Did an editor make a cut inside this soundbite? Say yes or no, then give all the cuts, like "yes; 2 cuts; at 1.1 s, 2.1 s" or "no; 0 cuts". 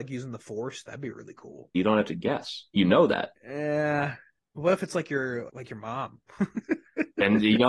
yes; 3 cuts; at 1.7 s, 3.4 s, 5.5 s